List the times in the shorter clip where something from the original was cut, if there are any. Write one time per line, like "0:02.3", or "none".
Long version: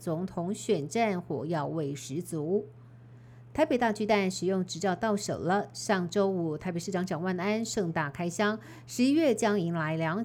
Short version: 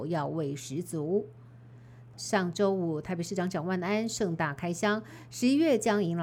0:02.1